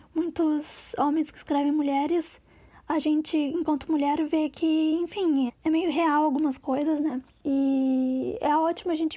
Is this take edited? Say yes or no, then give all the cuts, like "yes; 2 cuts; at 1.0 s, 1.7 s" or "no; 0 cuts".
yes; 1 cut; at 5.5 s